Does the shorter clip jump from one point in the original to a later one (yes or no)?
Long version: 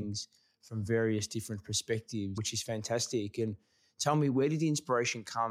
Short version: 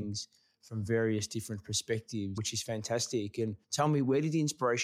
yes